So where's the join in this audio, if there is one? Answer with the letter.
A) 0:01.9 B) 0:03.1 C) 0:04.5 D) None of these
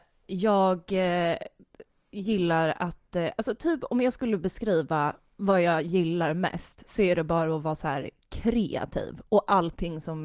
D